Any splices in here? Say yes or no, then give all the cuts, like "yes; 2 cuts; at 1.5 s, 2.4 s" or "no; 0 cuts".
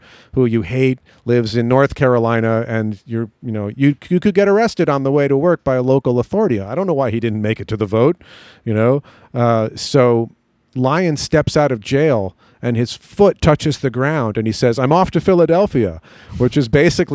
no; 0 cuts